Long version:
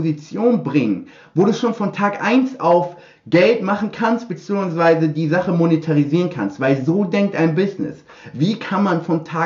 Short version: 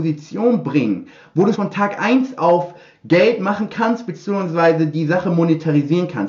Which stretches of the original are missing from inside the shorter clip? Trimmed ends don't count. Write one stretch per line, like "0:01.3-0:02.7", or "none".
0:01.5-0:01.8